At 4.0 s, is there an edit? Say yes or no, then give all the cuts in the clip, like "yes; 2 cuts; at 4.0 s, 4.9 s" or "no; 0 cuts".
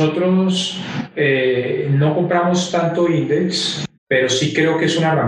yes; 1 cut; at 4.0 s